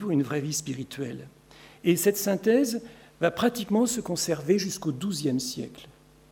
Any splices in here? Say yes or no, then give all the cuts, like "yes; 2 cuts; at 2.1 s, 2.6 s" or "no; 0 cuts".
no; 0 cuts